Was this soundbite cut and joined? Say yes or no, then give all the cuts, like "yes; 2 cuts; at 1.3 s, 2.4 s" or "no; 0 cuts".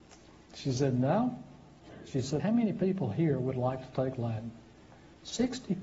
yes; 1 cut; at 2.4 s